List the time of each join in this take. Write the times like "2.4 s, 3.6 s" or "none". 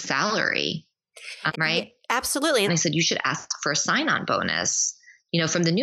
1.5 s, 2.7 s